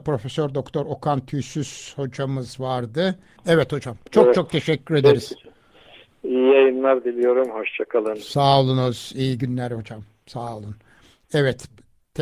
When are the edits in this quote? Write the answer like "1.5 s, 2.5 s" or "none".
3.4 s